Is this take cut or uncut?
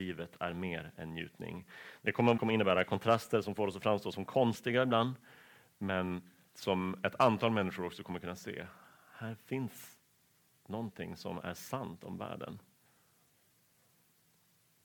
cut